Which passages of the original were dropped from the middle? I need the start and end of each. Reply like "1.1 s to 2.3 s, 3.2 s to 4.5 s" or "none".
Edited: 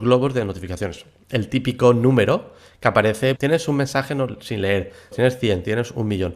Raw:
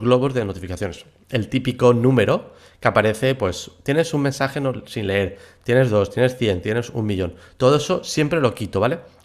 3.4 s to 3.8 s, 5.6 s to 6.1 s

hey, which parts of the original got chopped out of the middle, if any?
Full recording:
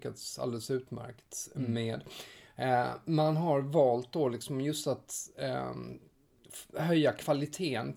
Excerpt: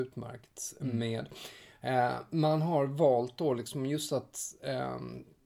none

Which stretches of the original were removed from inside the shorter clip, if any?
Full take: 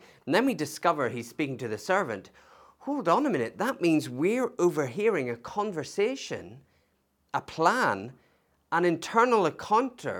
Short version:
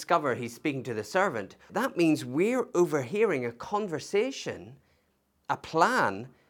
2.4 s to 3.5 s

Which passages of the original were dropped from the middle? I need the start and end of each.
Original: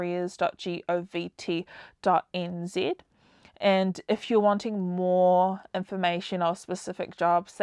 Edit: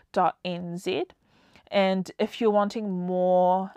none

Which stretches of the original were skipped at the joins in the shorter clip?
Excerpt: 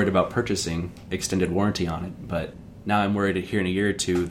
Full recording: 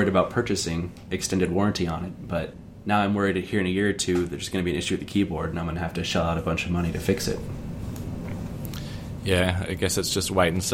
none

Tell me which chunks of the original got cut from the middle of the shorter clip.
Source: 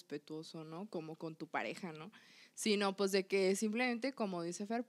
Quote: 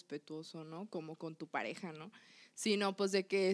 none

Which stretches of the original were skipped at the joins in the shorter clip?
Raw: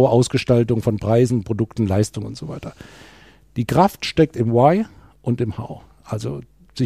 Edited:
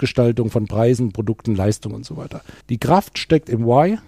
2.9 s to 3.5 s

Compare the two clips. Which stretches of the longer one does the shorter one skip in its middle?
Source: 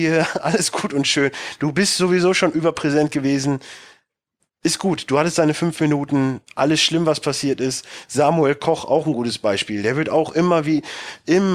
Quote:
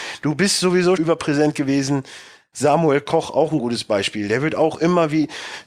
2.3 s to 2.5 s, 4.1 s to 8.1 s

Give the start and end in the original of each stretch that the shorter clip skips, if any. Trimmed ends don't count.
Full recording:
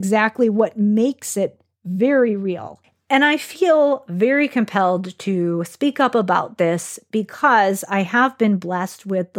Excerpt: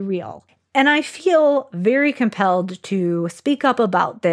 none

